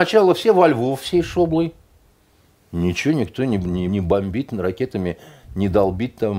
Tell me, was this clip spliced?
yes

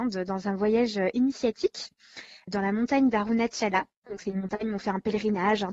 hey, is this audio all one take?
yes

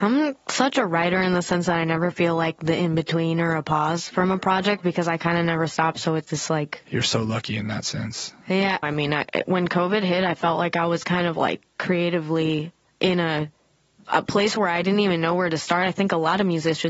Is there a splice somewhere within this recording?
yes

